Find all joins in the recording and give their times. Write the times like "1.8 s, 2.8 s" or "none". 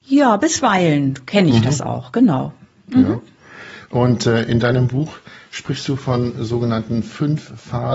none